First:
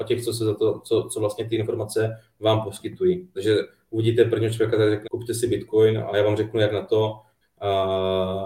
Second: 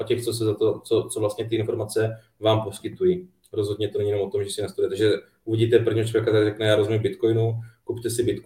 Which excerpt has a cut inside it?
first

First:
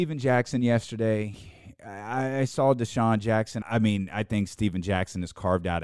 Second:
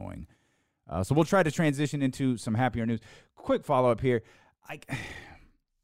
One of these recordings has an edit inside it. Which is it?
first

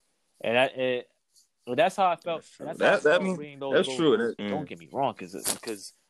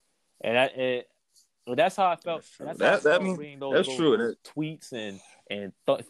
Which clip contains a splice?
first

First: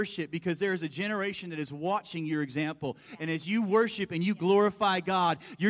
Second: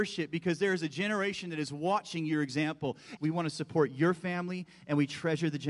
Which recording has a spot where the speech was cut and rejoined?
second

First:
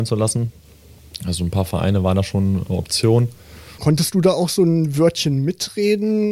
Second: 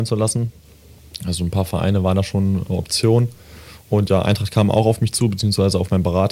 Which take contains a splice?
first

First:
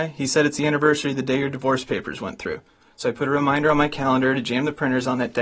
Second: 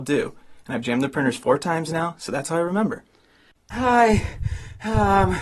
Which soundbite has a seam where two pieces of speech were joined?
second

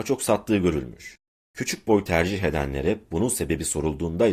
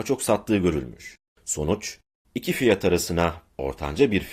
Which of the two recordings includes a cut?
second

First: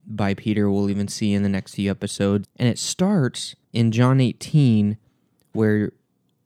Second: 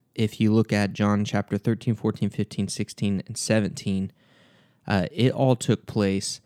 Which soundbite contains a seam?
first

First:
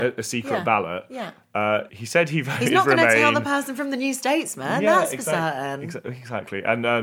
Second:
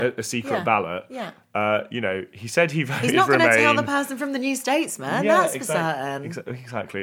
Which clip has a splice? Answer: first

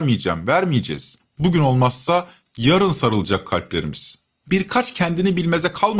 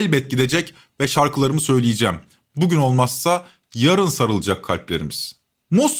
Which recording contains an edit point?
first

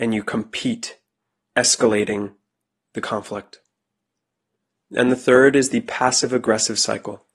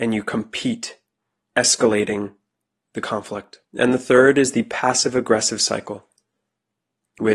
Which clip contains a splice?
second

